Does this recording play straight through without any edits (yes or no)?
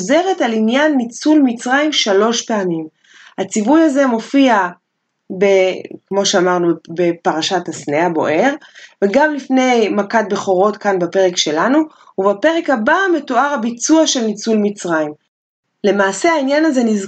yes